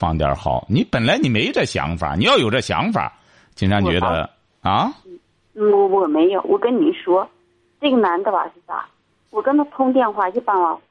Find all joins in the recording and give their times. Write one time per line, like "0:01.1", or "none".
none